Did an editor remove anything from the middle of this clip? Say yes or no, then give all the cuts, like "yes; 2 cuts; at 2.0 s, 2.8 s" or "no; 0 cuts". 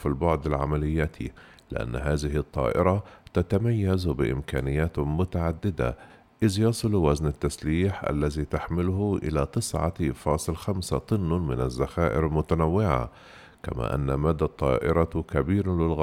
no; 0 cuts